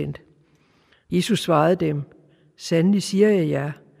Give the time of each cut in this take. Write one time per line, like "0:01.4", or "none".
0:01.1